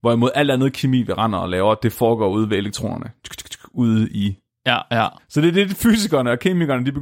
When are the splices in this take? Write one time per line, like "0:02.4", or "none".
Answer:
0:05.2